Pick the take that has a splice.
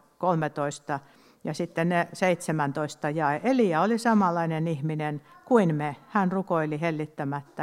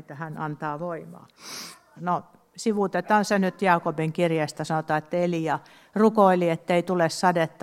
second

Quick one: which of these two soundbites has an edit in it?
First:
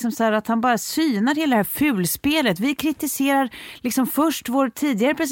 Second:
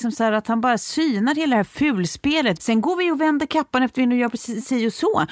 second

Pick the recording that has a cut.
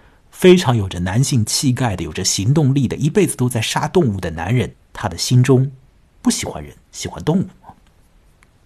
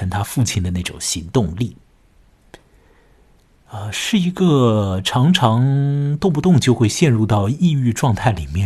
first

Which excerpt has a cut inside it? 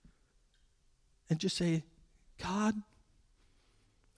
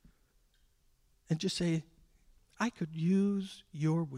second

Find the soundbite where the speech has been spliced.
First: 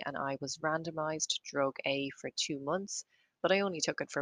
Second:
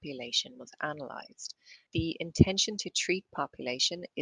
second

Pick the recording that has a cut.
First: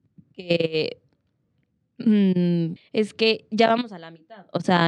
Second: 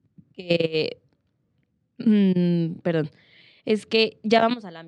first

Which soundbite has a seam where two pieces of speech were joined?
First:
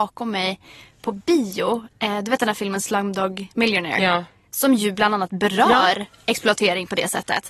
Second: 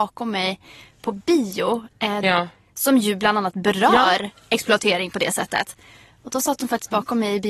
second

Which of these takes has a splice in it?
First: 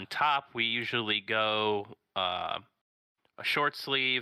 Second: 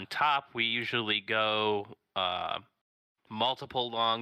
second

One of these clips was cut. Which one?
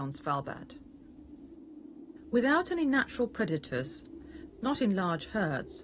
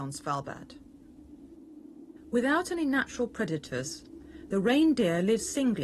first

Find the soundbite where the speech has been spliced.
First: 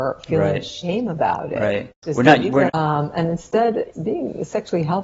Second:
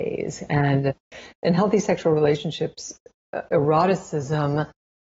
first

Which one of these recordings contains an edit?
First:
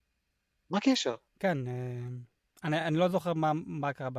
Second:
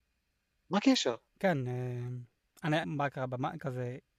second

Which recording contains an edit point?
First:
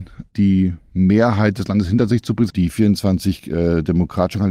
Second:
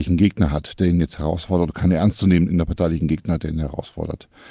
first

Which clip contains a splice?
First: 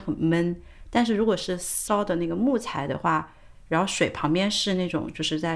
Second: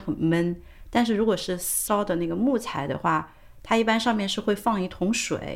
first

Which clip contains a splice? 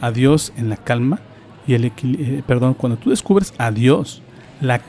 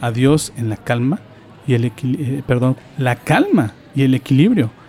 second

